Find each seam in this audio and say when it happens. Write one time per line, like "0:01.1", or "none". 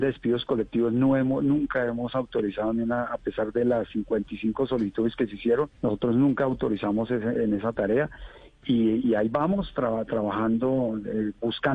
0:05.7

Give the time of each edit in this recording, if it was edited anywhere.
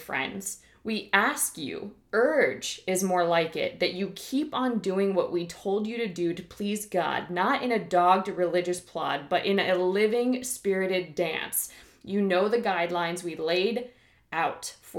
none

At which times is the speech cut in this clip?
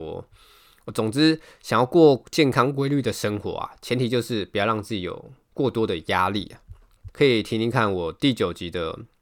0:07.1

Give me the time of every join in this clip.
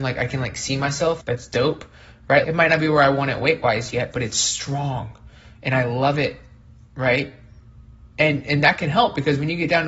0:01.2
0:02.4

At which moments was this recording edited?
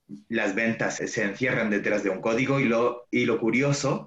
0:01.0

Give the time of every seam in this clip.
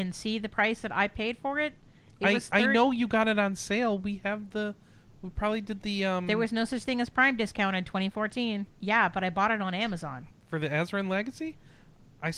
0:08.7
0:10.3

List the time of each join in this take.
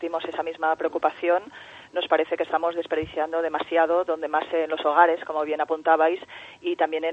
none

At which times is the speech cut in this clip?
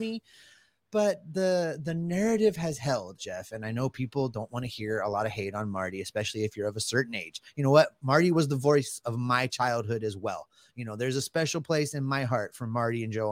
0:03.2

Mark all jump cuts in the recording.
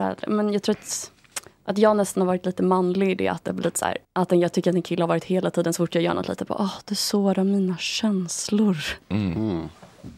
0:04.0

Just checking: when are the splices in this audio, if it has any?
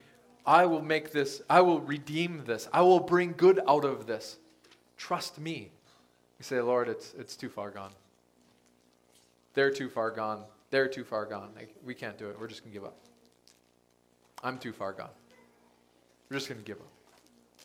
none

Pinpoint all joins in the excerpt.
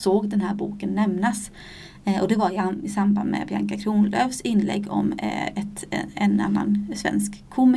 none

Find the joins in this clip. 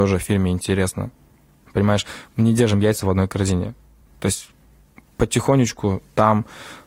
none

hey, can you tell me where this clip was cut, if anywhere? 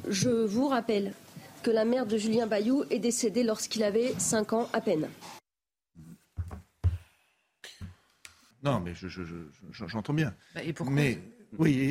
0:08.5

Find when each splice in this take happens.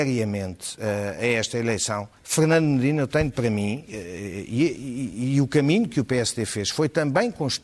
0:02.2

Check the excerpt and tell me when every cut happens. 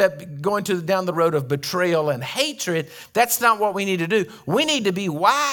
none

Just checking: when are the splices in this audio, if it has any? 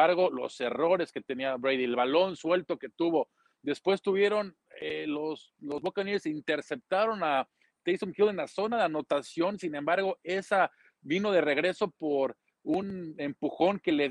none

